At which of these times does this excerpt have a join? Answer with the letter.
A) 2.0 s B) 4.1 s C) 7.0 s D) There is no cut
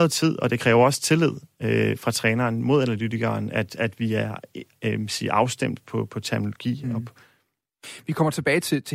D